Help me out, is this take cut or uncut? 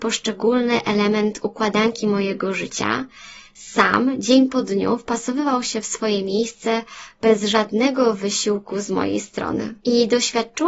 cut